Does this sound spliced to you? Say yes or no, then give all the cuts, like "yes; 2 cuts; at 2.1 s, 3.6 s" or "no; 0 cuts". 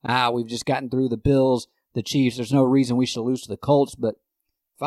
no; 0 cuts